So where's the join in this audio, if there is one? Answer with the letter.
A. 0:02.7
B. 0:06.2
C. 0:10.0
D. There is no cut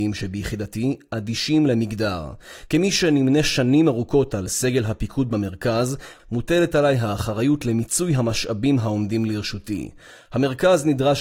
B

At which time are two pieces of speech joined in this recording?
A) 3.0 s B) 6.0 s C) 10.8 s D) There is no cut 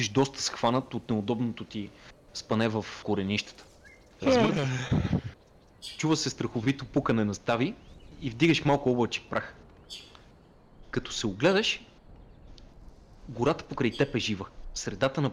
A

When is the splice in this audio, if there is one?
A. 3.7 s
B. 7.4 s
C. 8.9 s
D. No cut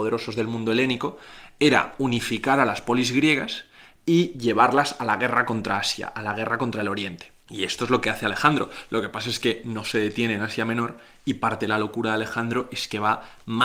B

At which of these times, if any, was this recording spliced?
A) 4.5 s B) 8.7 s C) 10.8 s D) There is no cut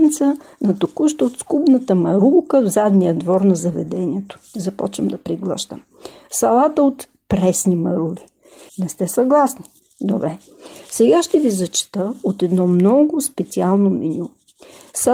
B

